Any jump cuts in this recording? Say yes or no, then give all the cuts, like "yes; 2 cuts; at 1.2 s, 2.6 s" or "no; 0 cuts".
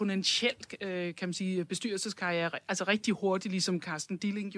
no; 0 cuts